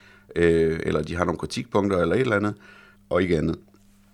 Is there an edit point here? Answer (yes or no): yes